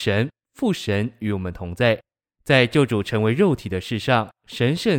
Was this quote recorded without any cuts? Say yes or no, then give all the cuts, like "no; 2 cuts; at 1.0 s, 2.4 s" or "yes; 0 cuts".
no; 1 cut; at 2.2 s